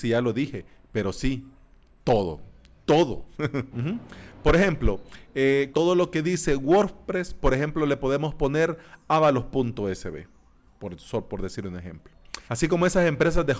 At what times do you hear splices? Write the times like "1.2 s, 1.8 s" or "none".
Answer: 3.7 s, 5.7 s, 12.5 s